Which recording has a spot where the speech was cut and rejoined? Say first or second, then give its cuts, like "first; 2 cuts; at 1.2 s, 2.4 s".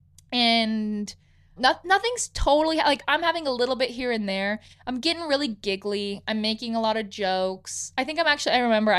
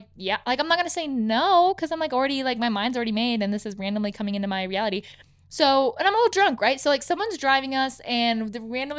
first; 1 cut; at 1.6 s